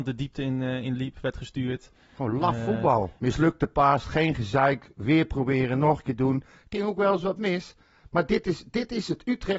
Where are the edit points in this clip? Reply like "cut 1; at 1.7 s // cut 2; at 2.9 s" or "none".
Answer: cut 1; at 3.2 s